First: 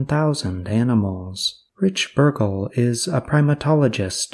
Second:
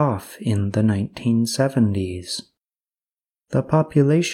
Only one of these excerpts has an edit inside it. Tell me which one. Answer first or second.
first